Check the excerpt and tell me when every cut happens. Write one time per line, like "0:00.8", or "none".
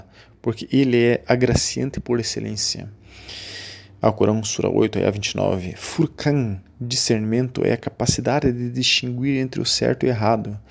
none